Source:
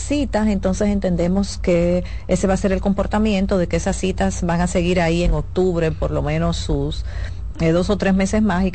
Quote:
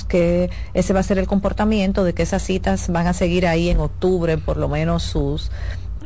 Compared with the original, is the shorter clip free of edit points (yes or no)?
yes